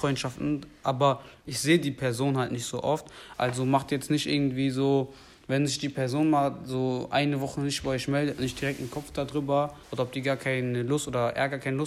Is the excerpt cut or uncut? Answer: cut